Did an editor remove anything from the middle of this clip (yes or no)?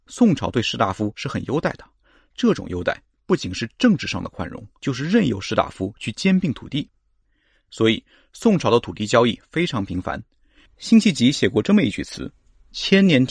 yes